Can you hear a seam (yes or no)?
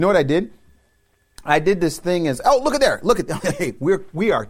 no